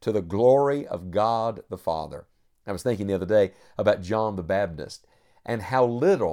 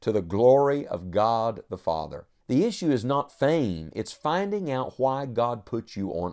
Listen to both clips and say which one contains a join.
second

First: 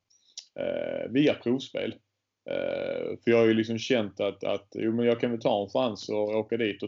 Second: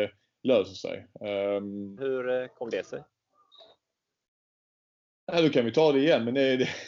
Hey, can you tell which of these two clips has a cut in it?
second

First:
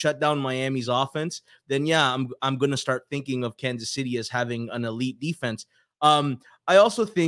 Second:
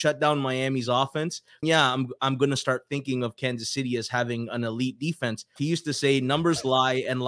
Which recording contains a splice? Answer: second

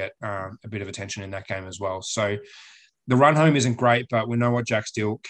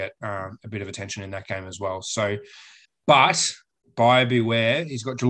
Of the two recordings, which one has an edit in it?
second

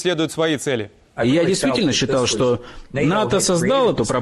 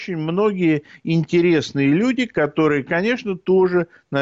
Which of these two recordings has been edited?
first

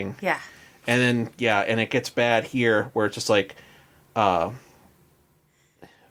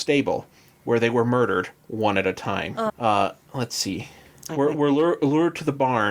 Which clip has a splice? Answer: second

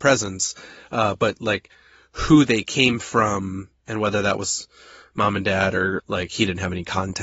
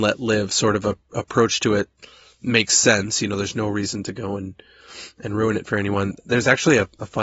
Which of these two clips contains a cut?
first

